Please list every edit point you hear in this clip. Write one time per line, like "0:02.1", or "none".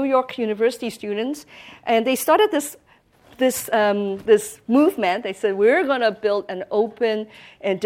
none